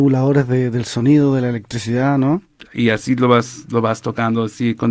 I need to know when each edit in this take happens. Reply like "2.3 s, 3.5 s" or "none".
none